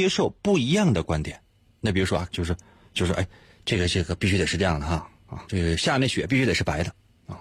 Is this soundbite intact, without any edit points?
no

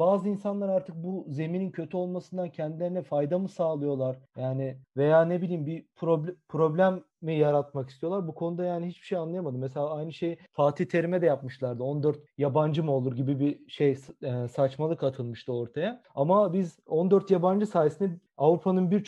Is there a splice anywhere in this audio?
no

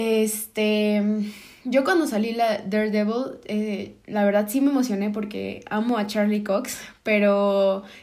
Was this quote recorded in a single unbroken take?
yes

